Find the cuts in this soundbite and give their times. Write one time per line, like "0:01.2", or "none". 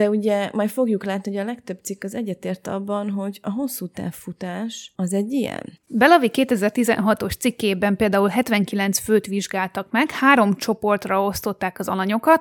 0:05.8